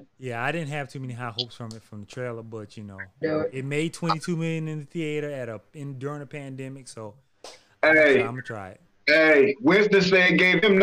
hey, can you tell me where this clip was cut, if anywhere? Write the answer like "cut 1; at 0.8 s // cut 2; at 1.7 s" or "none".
cut 1; at 3.2 s